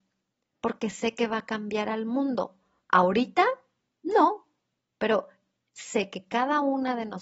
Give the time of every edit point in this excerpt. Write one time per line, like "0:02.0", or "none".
0:04.9